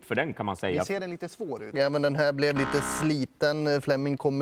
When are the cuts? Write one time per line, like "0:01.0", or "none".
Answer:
0:01.7